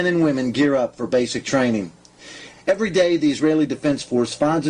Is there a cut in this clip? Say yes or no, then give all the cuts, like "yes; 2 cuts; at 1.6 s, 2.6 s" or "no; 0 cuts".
yes; 1 cut; at 2.5 s